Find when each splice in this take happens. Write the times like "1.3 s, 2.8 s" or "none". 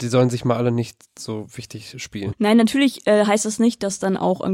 1.1 s, 2.3 s